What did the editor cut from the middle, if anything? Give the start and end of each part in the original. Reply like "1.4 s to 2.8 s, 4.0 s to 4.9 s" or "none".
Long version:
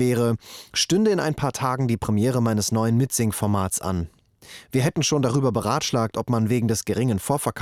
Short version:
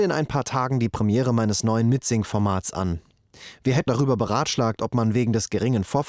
5.0 s to 5.2 s